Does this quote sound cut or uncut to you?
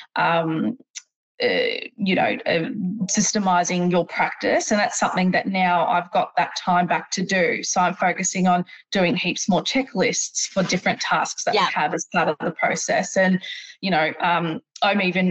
uncut